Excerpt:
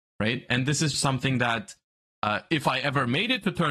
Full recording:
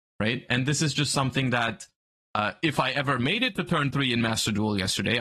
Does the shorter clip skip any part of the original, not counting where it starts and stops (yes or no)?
yes